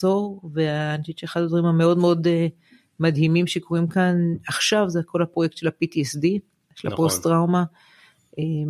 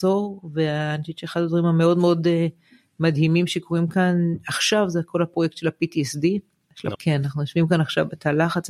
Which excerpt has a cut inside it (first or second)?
second